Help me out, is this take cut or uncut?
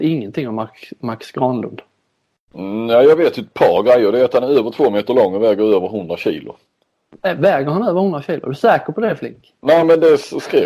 uncut